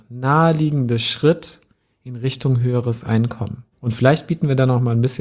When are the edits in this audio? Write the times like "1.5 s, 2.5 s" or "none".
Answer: 3.7 s